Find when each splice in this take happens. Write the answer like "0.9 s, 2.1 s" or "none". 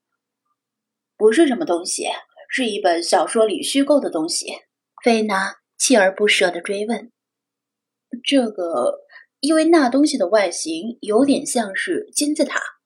4.9 s